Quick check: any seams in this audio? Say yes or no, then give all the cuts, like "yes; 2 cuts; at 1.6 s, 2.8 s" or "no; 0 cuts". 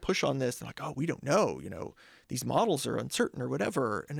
yes; 1 cut; at 0.9 s